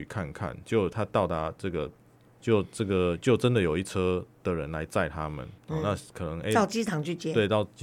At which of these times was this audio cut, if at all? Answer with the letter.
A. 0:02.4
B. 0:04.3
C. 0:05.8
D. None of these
A